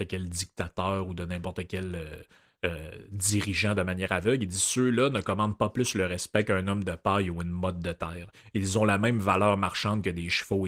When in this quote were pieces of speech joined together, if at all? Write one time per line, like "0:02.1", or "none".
none